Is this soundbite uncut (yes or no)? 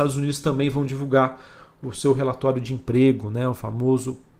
yes